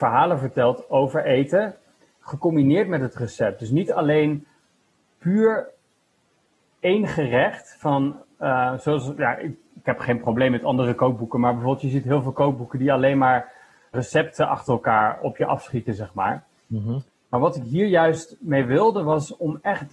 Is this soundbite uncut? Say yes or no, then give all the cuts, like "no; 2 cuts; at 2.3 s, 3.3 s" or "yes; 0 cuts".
no; 1 cut; at 13.9 s